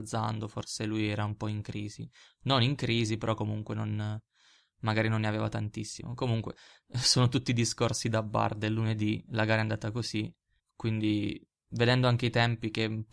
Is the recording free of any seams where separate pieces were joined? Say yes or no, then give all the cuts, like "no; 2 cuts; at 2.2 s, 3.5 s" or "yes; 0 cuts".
no; 1 cut; at 10.6 s